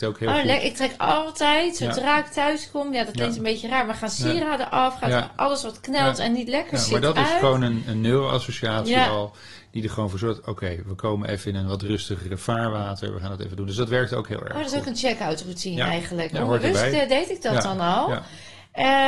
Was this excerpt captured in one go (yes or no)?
yes